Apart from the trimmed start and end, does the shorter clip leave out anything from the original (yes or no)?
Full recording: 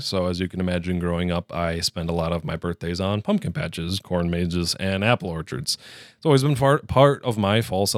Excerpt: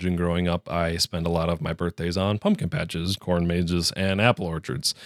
no